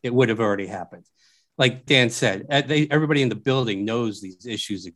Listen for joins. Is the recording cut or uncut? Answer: cut